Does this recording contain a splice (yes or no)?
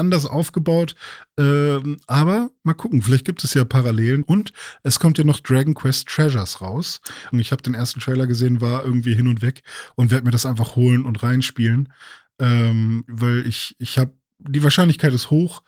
yes